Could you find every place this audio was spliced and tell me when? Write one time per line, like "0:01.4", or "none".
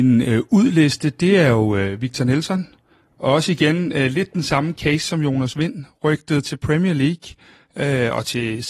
none

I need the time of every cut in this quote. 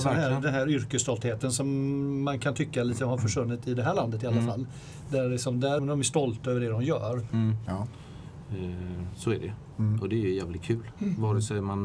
0:05.8
0:07.7

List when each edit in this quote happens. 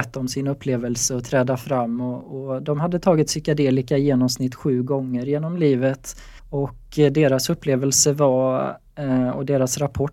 0:06.4

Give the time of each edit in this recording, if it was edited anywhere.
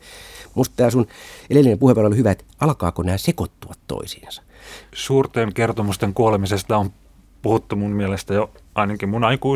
0:04.9

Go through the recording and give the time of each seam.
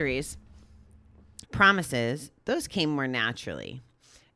0:01.4

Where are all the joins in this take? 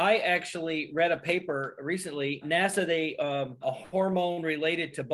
0:02.4
0:03.6

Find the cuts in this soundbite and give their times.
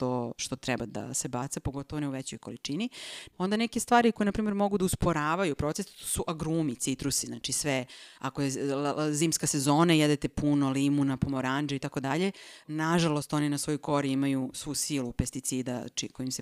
0:03.3
0:12.6

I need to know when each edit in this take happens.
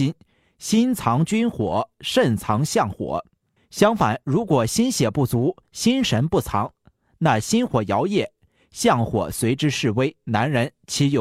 0:03.6

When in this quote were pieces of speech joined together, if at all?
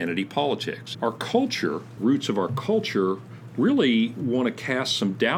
0:00.9
0:02.0

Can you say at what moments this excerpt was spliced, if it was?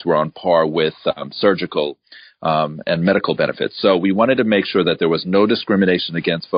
none

